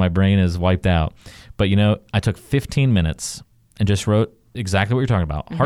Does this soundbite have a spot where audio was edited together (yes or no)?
no